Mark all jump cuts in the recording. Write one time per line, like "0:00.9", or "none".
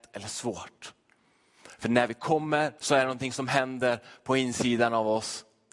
0:02.8